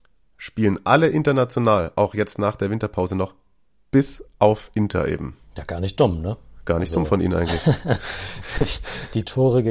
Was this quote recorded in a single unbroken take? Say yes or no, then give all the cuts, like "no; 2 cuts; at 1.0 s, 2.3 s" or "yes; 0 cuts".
yes; 0 cuts